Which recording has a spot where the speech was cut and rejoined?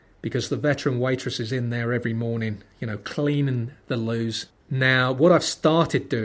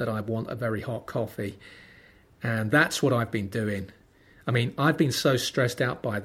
first; 1 cut; at 4.6 s

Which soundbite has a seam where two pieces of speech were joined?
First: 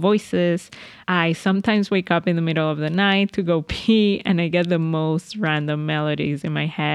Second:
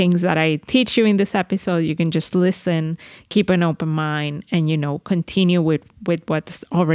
first; 1 cut; at 1.0 s

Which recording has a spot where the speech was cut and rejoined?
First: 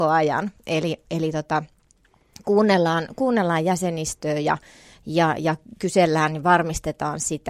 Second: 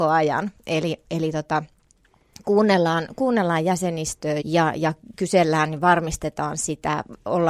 second; 1 cut; at 4.4 s

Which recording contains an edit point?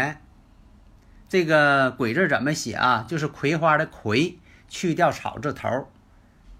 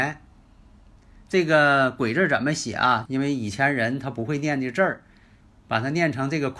second; 1 cut; at 3.1 s

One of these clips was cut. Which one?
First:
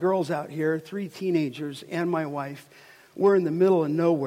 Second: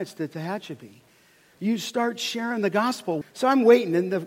second; 1 cut; at 3.2 s

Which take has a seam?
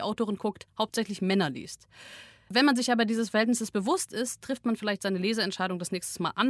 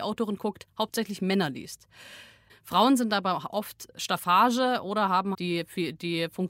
second; 2 cuts; at 2.5 s, 5.3 s

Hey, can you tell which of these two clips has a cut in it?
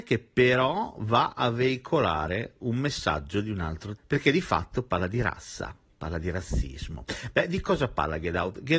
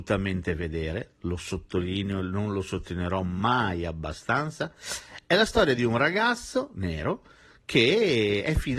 first; 1 cut; at 4.0 s

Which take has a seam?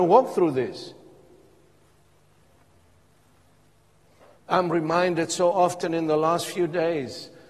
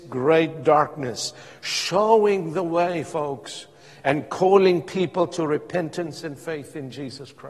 first; 1 cut; at 4.3 s

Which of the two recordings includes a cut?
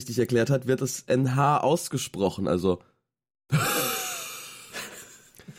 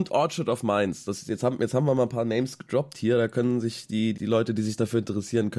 second; 1 cut; at 4.1 s

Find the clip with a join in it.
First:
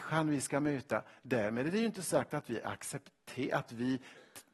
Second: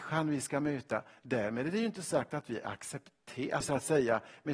second; 1 cut; at 3.6 s

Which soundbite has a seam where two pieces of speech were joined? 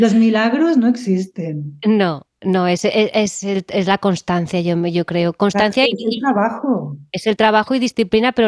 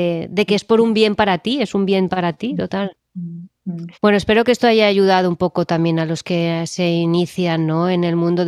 second; 1 cut; at 3.9 s

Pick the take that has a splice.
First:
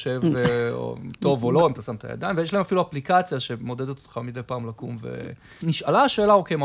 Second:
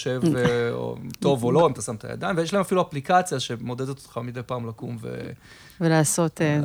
first; 1 cut; at 5.6 s

